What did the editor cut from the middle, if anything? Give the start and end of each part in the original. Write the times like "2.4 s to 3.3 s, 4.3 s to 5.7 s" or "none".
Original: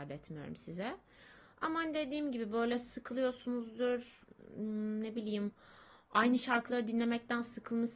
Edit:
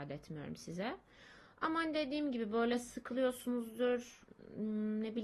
none